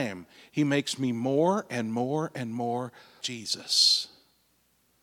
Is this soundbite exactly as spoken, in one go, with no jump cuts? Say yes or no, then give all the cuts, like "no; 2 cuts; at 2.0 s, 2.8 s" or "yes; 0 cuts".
no; 1 cut; at 3.2 s